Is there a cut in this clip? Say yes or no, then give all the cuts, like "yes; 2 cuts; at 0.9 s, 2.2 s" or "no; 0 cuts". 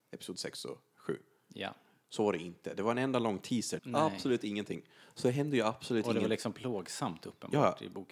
yes; 1 cut; at 3.8 s